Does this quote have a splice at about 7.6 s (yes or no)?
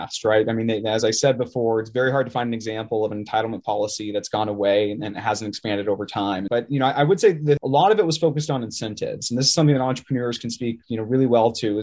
yes